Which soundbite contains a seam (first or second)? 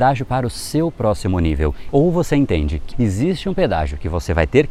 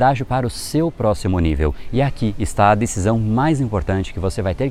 first